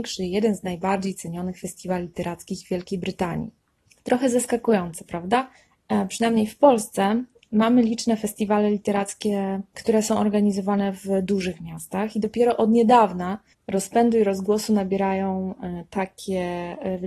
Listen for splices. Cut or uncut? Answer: uncut